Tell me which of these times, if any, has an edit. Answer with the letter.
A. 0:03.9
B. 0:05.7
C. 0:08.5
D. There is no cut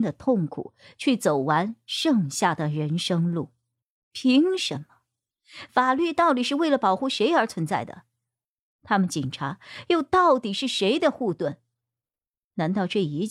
A